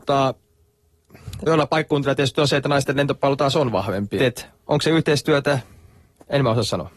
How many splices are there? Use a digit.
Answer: 2